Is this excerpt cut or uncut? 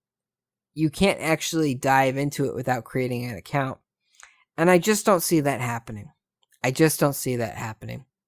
uncut